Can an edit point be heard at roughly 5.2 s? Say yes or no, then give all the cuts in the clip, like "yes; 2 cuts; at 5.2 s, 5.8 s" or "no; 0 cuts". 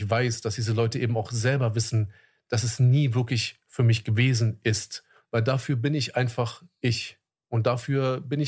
yes; 1 cut; at 5.2 s